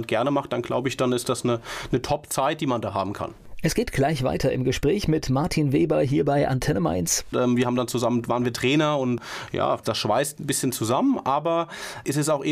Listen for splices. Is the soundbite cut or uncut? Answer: cut